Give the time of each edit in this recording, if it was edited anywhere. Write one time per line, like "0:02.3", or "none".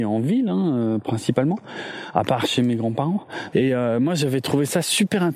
0:03.5